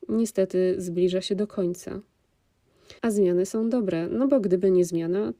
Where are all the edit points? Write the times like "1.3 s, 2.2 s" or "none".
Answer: 3.0 s